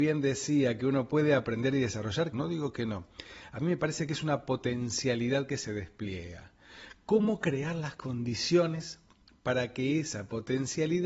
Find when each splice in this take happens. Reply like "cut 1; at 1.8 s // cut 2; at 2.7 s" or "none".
cut 1; at 2.3 s